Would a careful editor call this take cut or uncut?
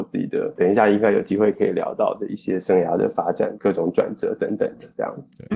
uncut